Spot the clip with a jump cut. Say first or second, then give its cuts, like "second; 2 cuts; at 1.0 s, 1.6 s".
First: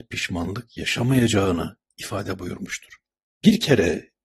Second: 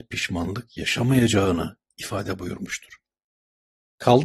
first; 1 cut; at 3.2 s